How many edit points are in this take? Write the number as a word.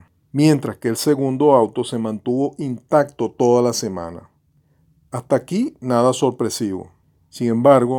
zero